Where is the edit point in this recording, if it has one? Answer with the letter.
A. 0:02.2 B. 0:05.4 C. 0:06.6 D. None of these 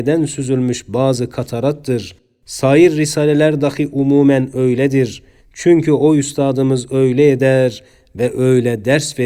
B